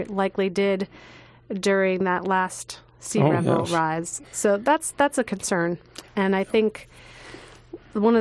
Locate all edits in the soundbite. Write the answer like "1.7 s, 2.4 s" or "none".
4.2 s, 6.1 s